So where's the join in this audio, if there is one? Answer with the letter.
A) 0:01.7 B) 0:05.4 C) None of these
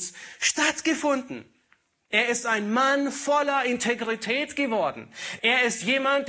B